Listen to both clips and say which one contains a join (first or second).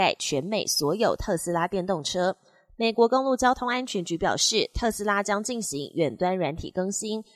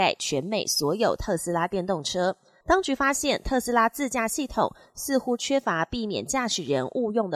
second